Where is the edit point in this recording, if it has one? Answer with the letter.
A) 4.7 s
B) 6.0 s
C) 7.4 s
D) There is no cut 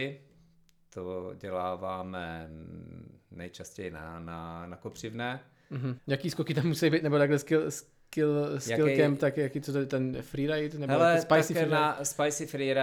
B